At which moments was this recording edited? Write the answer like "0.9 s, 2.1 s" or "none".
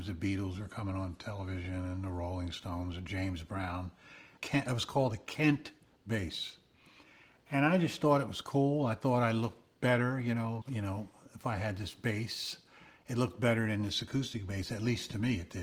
4.4 s, 10.6 s